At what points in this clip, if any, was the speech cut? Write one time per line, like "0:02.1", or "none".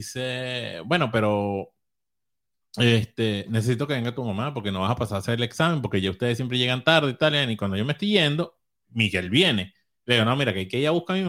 none